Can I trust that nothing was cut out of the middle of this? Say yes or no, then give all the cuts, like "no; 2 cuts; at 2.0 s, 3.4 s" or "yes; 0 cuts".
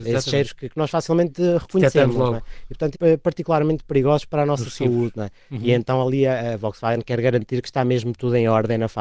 no; 1 cut; at 2.9 s